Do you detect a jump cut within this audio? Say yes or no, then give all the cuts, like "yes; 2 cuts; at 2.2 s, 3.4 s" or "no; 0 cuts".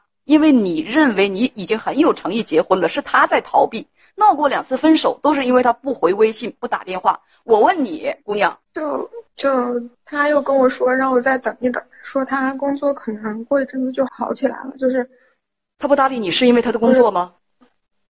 yes; 3 cuts; at 8.6 s, 9.9 s, 14.1 s